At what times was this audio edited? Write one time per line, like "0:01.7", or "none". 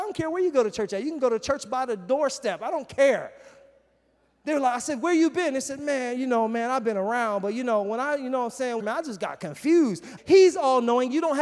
0:08.8
0:10.2